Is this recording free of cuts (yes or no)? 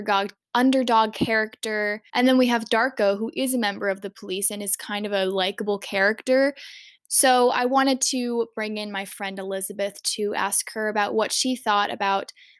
no